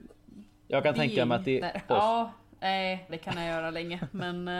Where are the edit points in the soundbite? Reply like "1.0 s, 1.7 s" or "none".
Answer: 1.9 s, 3.1 s